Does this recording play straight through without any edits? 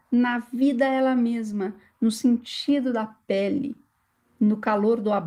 yes; 0 cuts

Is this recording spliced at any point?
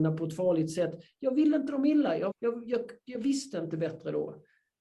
yes; 1 cut; at 2.3 s

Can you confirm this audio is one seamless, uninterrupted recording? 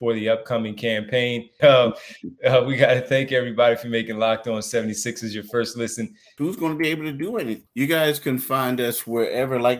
no; 3 cuts; at 1.6 s, 6.4 s, 7.7 s

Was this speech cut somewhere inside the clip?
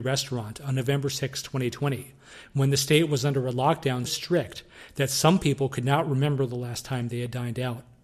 yes; 1 cut; at 4.0 s

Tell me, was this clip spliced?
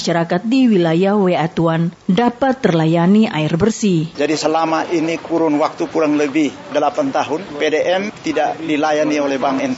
yes; 1 cut; at 4.1 s

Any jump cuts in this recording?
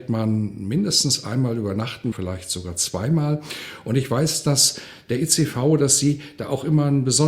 yes; 1 cut; at 2.1 s

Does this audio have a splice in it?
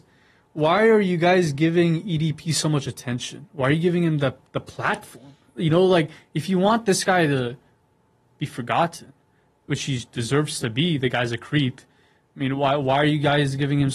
no; 0 cuts

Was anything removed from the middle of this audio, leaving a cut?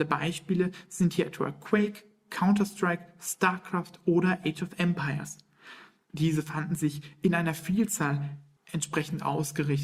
no; 0 cuts

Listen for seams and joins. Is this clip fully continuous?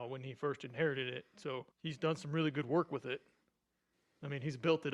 no; 1 cut; at 1.7 s

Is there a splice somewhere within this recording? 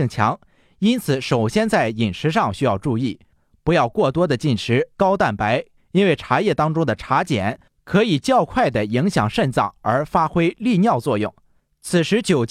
yes; 1 cut; at 5.8 s

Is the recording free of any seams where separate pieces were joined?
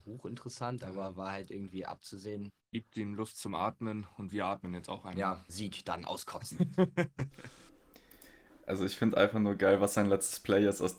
no; 2 cuts; at 2.6 s, 5.5 s

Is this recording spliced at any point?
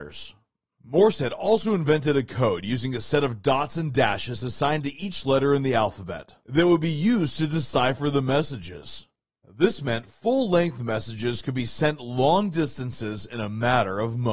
no; 0 cuts

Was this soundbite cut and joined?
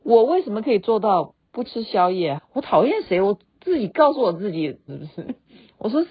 yes; 2 cuts; at 2.4 s, 4.9 s

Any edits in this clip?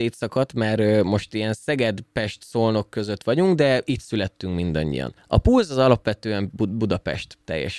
no; 0 cuts

